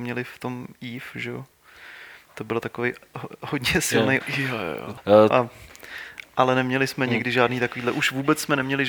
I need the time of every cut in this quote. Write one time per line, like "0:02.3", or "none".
0:04.2
0:05.3